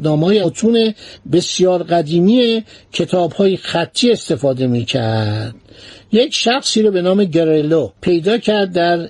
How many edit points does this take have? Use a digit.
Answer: 1